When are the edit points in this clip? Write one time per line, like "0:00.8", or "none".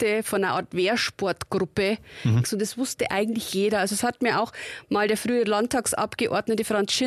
0:02.4